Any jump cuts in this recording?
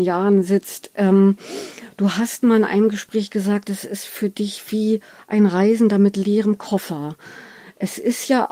no; 0 cuts

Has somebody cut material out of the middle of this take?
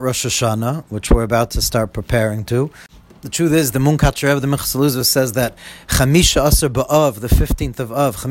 no; 0 cuts

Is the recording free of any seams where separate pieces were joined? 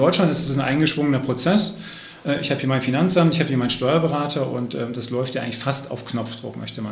yes; 0 cuts

